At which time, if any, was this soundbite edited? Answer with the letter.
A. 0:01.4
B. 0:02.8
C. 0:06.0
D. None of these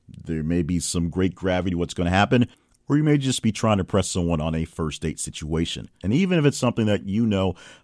C